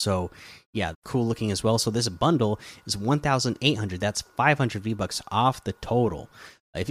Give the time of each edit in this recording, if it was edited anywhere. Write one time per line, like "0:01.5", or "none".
0:00.9

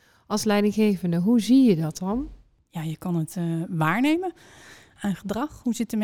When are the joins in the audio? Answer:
none

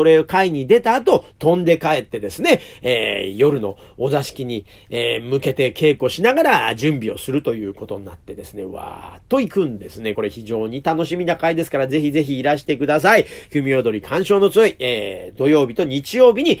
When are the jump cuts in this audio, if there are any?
none

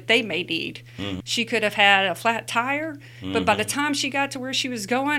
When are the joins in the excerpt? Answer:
0:01.2

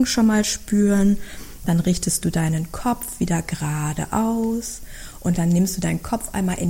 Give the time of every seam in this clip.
none

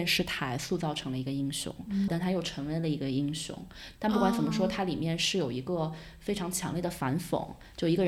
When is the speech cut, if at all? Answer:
0:02.1
0:03.9

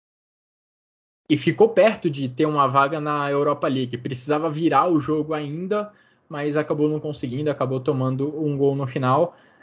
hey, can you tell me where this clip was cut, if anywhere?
none

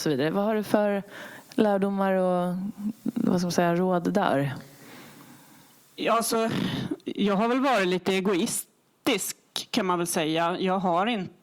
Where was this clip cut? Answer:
none

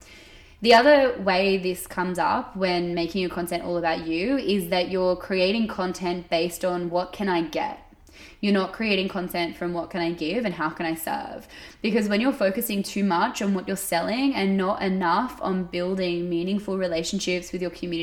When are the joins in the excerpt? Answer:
none

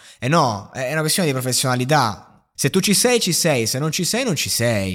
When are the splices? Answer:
0:02.6

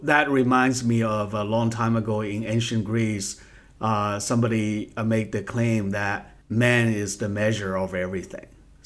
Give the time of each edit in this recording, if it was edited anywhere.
0:06.4

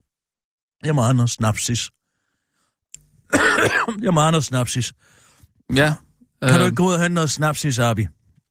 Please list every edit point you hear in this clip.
none

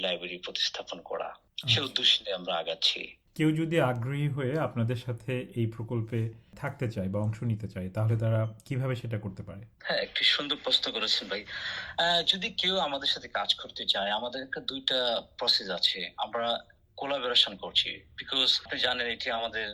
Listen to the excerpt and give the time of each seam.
0:09.7

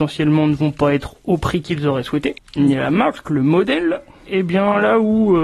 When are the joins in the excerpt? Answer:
0:02.4
0:04.3

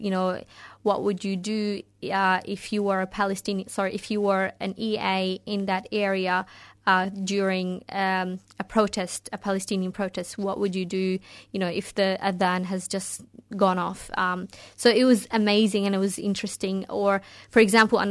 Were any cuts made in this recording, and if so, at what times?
none

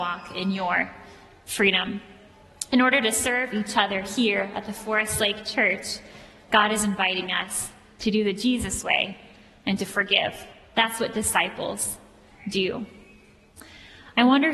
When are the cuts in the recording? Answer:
none

